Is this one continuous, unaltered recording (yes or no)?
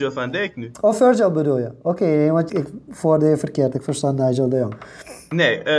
no